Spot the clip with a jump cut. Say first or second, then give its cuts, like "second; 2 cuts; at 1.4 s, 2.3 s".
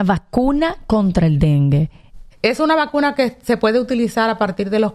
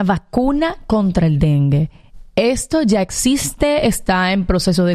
first; 1 cut; at 2.3 s